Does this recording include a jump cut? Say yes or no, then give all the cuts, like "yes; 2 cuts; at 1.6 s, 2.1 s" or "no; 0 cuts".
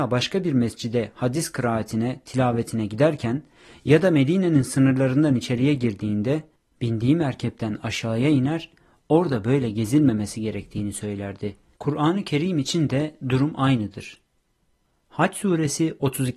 yes; 1 cut; at 11.7 s